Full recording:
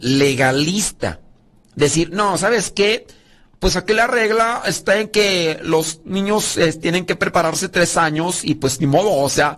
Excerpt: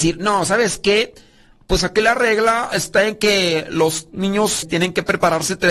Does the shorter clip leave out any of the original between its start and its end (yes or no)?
yes